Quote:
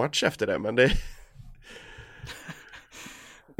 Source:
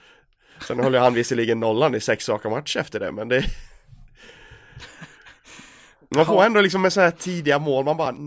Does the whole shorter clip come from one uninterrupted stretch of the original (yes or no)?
yes